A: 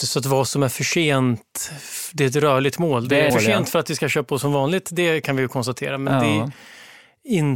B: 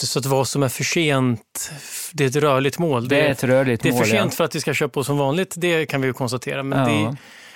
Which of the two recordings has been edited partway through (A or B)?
A